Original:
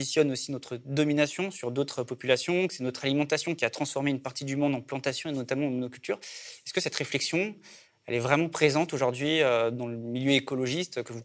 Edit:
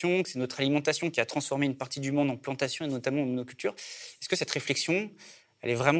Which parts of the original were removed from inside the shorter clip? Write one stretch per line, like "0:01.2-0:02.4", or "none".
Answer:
none